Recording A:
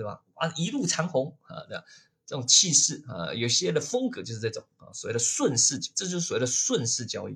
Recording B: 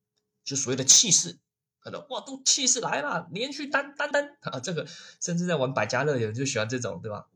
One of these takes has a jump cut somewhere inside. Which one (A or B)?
B